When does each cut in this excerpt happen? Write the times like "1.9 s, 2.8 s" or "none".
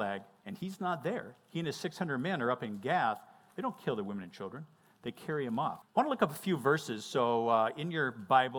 5.8 s